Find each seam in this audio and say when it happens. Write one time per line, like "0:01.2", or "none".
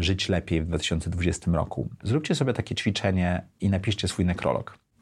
0:02.0

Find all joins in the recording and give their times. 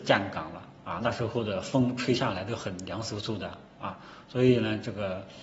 none

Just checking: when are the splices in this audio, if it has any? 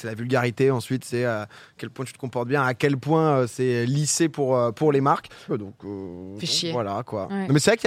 0:05.5

